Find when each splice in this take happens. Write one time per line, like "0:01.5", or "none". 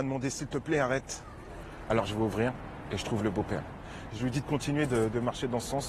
0:01.9
0:04.1